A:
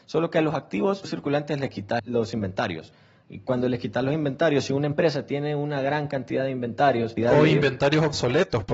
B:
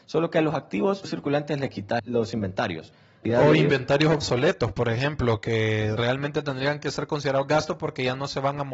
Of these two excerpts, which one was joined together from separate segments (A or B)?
B